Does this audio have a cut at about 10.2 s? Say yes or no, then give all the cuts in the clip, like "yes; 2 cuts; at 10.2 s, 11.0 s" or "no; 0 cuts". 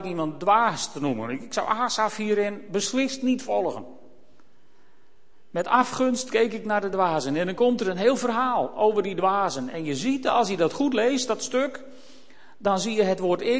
no; 0 cuts